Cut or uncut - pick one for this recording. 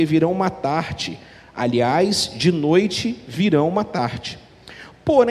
uncut